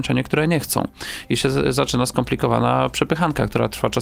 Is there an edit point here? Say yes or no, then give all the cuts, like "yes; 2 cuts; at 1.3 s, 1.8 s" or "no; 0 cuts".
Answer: no; 0 cuts